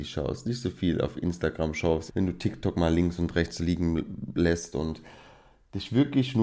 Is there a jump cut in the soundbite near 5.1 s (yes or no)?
no